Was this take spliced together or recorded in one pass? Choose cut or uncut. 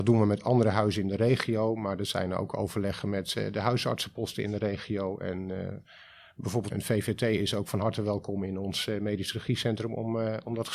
cut